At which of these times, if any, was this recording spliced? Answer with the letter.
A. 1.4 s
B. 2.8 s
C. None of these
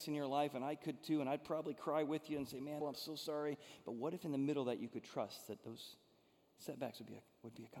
B